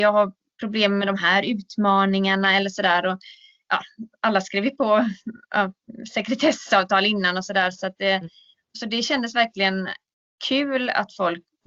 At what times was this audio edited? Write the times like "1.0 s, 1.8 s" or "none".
none